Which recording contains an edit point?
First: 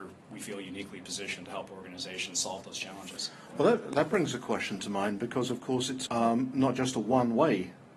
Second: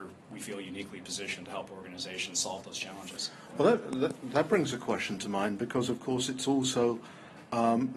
first; 2 cuts; at 3.9 s, 6.1 s

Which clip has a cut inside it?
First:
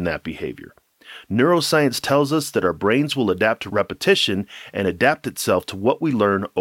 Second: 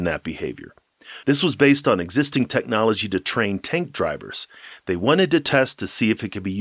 second; 1 cut; at 1.2 s

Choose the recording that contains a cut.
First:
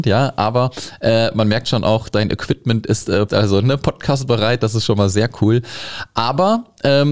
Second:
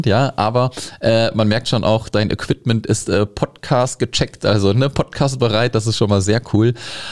first; 1 cut; at 3.3 s

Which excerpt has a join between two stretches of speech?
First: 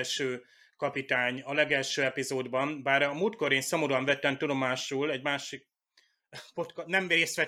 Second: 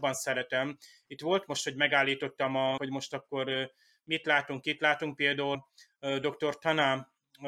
second; 2 cuts; at 2.8 s, 5.5 s

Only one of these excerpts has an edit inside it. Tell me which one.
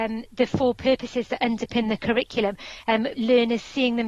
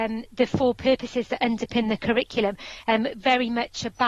first; 1 cut; at 3.1 s

